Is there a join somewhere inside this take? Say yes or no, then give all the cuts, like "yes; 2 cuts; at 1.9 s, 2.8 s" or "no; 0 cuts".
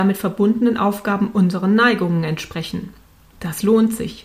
yes; 1 cut; at 3.3 s